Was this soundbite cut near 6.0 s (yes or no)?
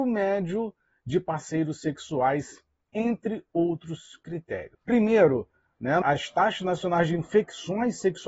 yes